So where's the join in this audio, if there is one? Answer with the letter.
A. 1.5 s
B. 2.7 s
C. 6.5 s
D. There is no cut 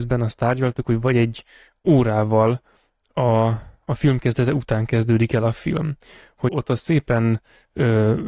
C